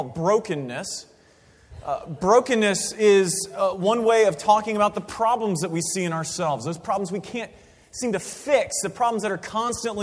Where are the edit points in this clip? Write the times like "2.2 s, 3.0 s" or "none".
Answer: none

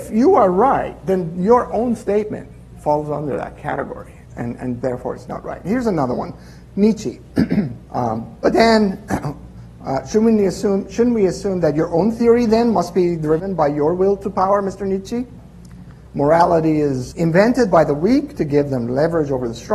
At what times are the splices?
7.9 s, 16.0 s, 17.1 s

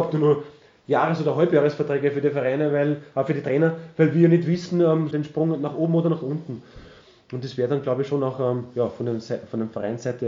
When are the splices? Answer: 5.1 s

